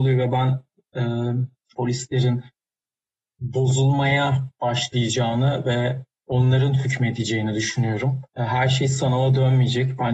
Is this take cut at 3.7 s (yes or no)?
no